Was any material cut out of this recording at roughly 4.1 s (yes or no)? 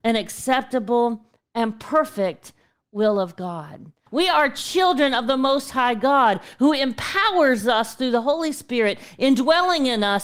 yes